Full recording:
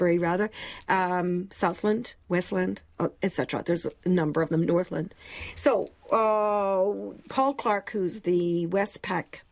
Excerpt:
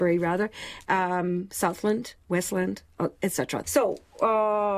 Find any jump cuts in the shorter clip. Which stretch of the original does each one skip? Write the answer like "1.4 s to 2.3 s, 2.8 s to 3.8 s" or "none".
3.6 s to 5.5 s

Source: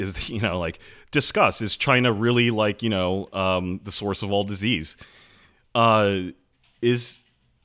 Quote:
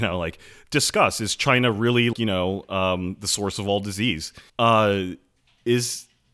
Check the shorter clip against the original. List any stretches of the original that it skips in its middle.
2.5 s to 2.8 s, 5.1 s to 5.7 s

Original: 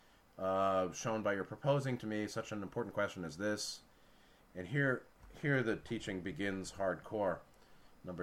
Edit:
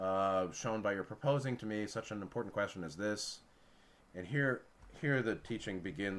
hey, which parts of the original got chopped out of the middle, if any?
none

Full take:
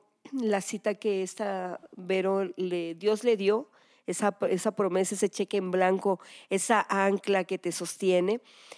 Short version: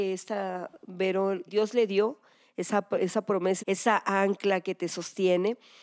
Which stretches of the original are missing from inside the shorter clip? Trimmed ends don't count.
2.6 s to 3.0 s, 5.1 s to 6.4 s

